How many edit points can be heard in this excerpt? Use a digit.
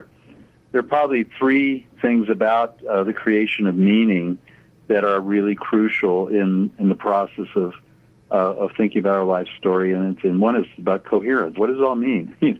1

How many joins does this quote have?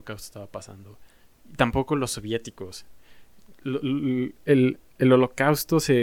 0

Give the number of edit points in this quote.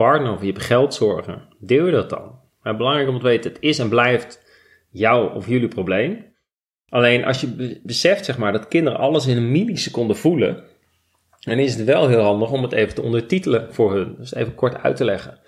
0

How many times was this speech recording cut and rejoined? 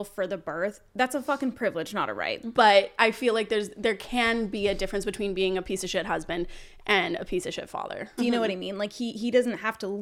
2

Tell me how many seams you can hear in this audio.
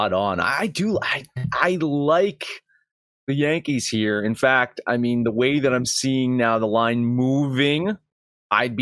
0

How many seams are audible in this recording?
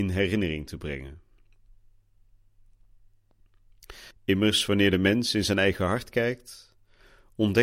1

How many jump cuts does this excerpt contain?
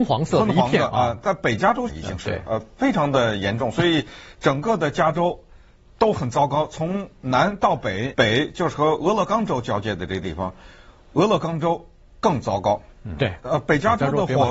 3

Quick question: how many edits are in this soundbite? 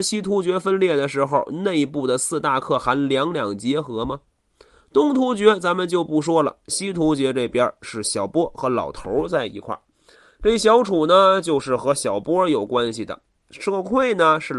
0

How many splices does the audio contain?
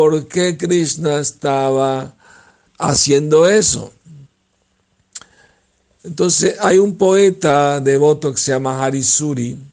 2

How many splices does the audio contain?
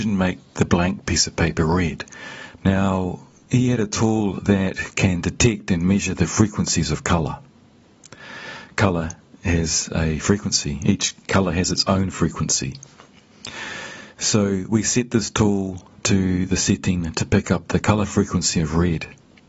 1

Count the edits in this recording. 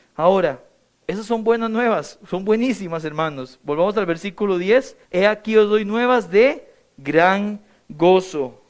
1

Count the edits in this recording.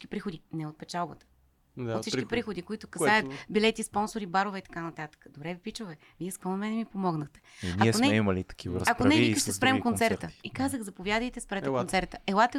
0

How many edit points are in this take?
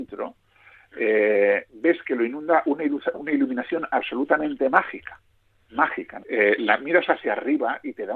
2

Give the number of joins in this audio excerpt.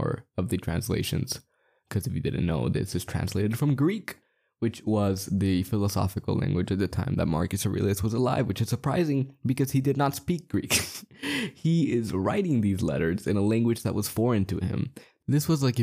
0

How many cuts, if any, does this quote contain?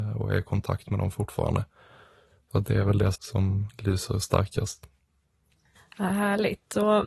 1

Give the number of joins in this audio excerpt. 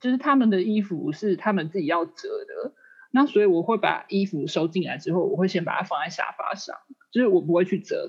0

